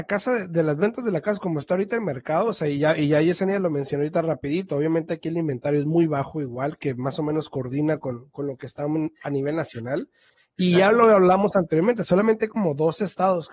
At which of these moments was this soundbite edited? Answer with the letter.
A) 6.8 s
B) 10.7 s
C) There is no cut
C